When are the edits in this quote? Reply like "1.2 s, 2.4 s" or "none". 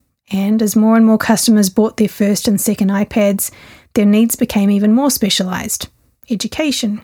none